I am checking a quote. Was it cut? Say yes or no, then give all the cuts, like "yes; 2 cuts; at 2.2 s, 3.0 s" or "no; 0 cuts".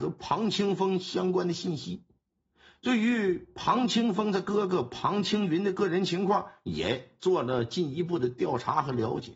no; 0 cuts